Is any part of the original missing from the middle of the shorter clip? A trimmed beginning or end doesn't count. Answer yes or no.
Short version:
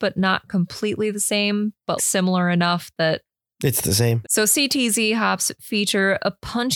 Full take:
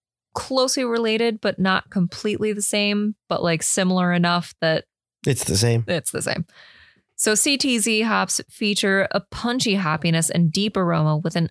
yes